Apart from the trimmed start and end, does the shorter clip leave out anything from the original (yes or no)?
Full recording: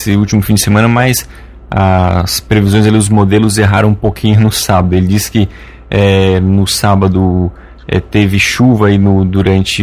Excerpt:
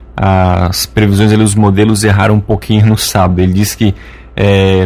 no